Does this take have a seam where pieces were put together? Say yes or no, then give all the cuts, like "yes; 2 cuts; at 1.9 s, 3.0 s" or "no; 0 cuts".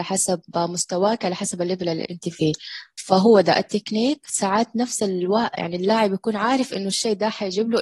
no; 0 cuts